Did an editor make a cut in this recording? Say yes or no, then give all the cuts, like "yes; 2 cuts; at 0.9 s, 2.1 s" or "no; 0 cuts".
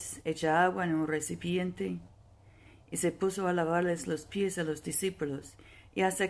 no; 0 cuts